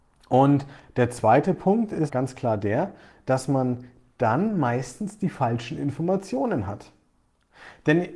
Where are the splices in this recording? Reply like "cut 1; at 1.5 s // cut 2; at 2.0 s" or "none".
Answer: cut 1; at 2.1 s